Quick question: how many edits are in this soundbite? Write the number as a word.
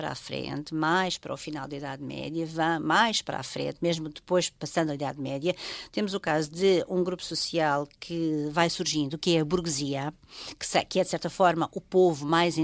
zero